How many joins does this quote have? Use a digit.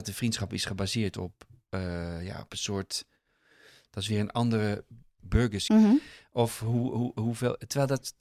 1